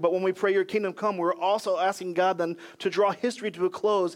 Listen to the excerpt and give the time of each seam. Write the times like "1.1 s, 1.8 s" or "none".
none